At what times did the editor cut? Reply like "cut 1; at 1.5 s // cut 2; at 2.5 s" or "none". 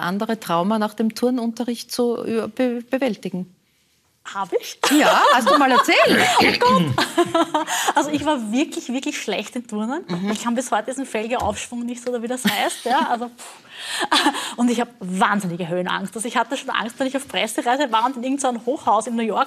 none